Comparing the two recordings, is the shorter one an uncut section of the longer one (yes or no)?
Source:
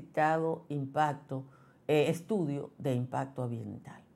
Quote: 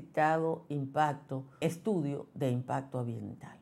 no